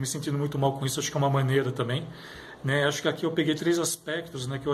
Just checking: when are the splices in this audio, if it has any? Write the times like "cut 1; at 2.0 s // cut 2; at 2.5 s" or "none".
none